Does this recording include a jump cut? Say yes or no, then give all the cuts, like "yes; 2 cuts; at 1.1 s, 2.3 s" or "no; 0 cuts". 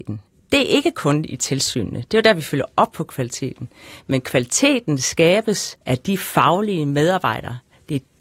yes; 1 cut; at 5.8 s